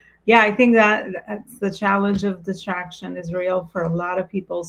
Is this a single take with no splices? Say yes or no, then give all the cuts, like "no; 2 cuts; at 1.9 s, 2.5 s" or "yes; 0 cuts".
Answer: yes; 0 cuts